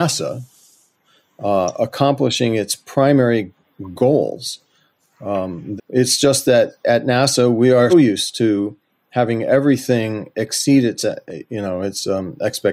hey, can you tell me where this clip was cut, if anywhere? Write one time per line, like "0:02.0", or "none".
0:05.8
0:07.9